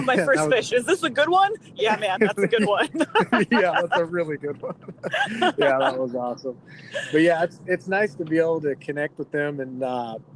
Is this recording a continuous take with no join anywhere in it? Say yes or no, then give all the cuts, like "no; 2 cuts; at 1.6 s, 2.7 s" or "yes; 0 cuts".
yes; 0 cuts